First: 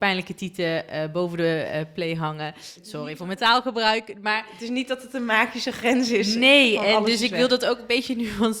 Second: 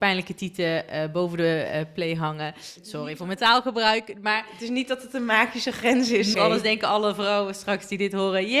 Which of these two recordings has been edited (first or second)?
second